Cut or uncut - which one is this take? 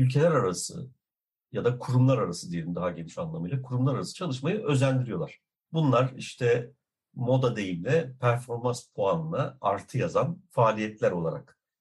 uncut